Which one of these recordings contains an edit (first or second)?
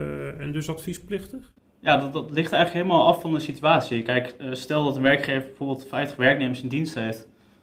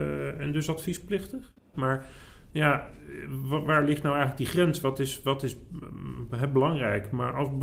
second